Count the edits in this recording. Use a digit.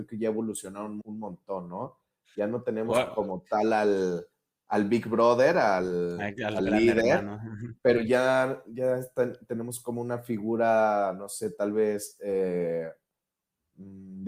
1